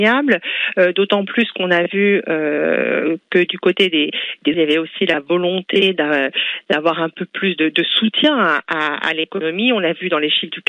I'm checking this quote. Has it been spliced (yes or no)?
yes